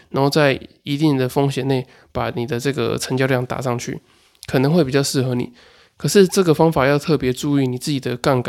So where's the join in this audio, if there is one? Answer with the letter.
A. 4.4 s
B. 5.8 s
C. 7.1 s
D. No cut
D